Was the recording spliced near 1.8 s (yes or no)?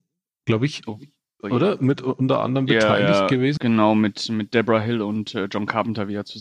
no